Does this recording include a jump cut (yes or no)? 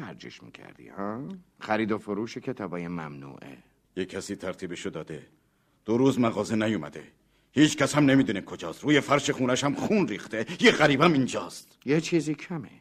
yes